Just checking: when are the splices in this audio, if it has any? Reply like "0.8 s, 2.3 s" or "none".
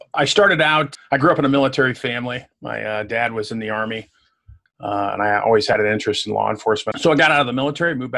0.9 s, 4.7 s, 6.9 s